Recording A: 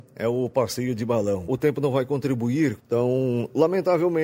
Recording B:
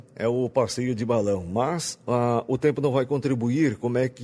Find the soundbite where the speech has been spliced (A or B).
A